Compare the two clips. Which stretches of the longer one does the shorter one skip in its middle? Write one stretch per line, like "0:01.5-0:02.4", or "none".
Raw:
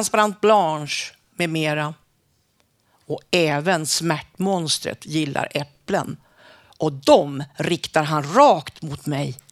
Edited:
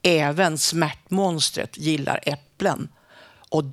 none